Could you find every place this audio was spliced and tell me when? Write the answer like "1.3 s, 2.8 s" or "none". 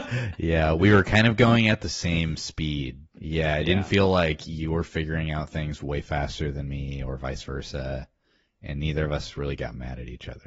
3.2 s